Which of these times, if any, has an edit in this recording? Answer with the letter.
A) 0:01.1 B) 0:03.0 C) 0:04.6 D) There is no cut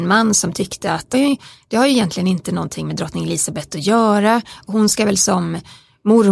A